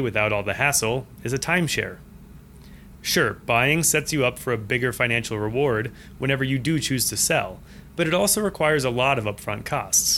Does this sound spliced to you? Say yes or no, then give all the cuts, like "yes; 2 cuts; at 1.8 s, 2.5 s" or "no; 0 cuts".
yes; 1 cut; at 3.0 s